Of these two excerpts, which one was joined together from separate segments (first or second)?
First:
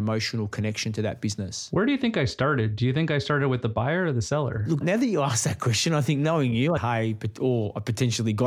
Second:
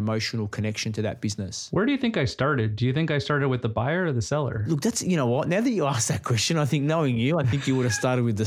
first